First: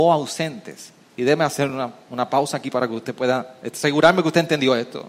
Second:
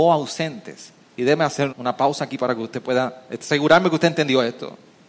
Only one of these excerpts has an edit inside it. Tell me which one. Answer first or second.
second